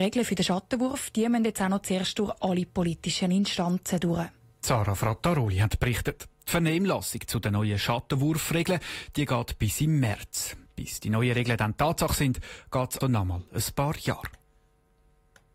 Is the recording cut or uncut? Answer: cut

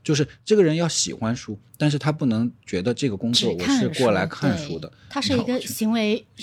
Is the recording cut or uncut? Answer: cut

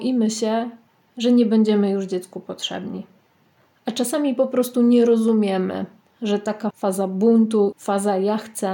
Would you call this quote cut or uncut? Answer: cut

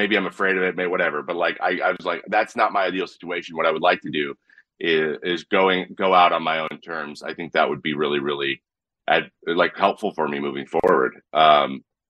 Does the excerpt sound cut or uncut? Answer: uncut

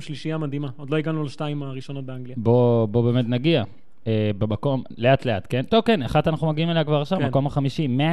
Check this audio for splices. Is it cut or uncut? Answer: uncut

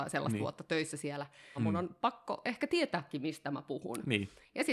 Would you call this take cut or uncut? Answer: cut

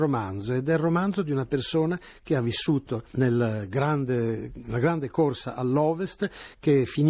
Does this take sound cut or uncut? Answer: uncut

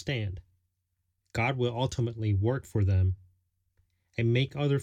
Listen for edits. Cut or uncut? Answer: cut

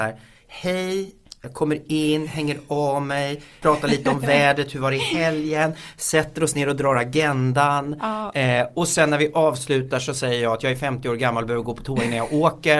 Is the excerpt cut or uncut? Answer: cut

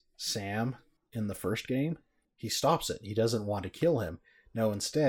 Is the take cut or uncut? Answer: uncut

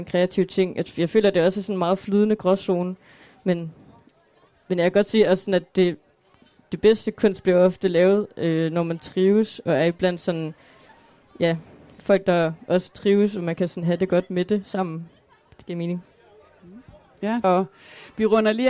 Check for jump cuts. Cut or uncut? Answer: cut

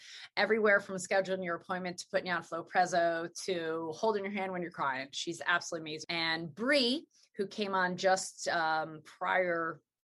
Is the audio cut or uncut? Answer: cut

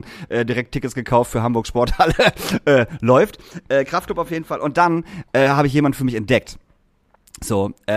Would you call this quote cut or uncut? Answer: uncut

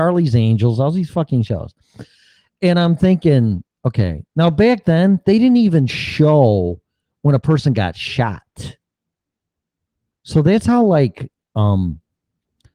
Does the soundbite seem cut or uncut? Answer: uncut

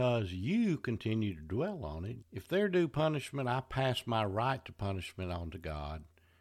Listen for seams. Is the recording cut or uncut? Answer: cut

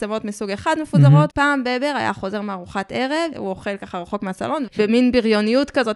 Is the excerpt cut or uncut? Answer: cut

